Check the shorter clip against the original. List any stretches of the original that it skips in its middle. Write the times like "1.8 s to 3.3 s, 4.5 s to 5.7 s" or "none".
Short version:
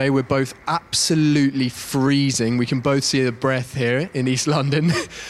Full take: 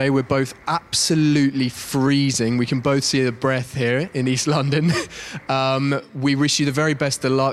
none